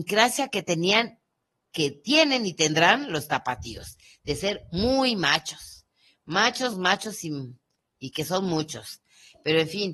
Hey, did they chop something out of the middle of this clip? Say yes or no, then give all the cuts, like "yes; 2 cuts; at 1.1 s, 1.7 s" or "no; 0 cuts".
yes; 1 cut; at 6.7 s